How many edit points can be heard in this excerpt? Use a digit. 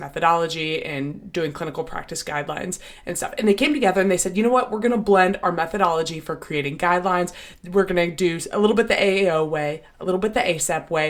0